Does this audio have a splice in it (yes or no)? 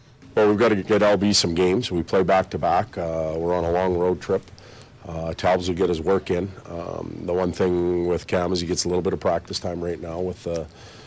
no